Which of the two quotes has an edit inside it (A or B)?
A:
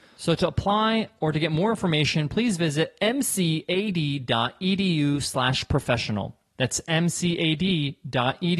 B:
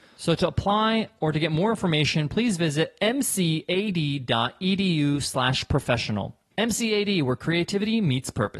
B